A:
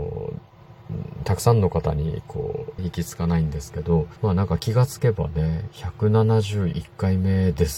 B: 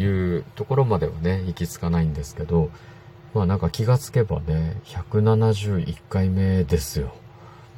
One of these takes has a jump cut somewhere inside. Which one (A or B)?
A